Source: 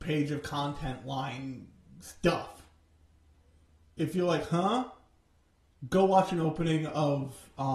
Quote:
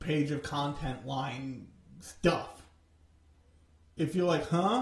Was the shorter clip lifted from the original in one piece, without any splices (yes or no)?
yes